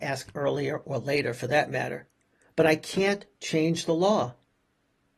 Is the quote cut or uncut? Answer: uncut